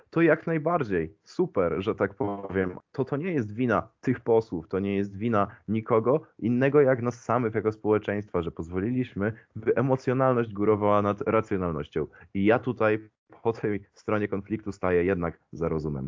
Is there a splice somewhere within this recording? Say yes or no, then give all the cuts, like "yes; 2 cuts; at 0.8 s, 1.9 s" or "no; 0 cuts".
yes; 1 cut; at 2.8 s